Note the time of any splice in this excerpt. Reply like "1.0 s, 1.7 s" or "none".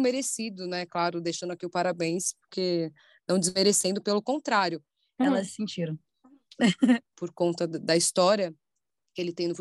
5.2 s, 7.0 s